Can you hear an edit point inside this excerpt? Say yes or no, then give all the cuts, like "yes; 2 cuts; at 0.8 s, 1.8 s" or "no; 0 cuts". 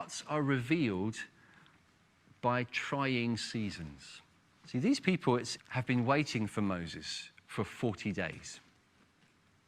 yes; 2 cuts; at 4.5 s, 5.6 s